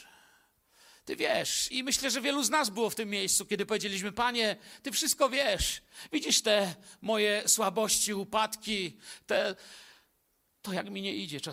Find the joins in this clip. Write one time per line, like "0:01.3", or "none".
0:01.7